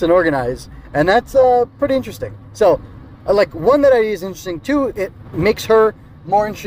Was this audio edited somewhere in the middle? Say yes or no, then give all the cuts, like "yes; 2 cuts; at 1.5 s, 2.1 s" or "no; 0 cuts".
no; 0 cuts